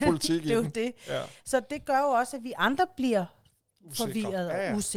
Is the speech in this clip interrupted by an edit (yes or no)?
no